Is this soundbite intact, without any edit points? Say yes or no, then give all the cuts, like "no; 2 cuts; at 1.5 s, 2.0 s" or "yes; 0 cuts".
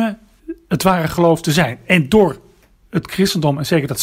yes; 0 cuts